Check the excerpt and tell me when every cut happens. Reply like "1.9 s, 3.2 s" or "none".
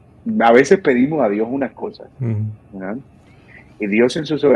none